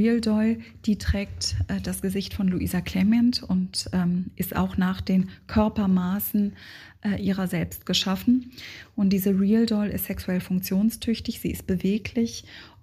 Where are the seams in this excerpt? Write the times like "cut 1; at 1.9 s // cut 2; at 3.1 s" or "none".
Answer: none